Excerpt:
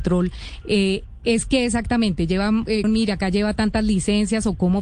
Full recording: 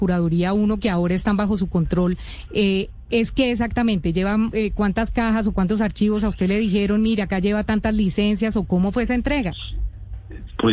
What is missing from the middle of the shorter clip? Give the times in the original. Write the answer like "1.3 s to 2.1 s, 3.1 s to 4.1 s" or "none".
4.7 s to 6.9 s